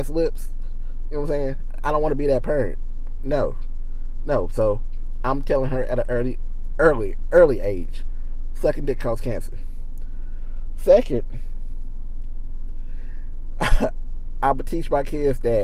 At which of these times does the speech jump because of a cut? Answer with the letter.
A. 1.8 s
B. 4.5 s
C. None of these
C